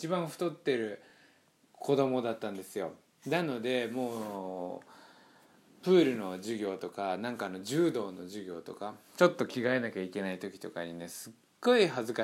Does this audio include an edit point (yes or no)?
no